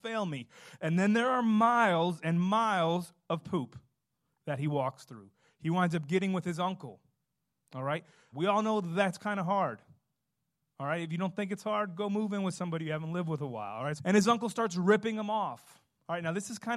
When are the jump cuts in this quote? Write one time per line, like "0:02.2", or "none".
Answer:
0:08.3
0:14.0